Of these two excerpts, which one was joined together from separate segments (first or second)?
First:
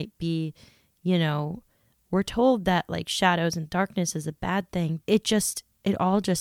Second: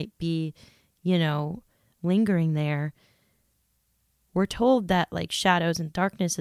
first